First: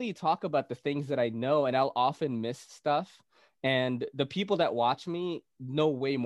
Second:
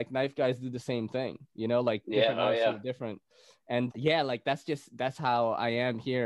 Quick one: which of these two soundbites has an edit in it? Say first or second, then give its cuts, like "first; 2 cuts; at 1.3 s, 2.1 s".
second; 2 cuts; at 3.9 s, 5.1 s